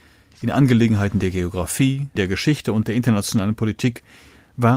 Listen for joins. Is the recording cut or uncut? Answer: cut